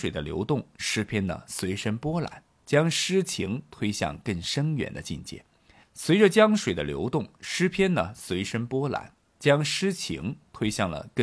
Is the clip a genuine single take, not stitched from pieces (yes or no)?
yes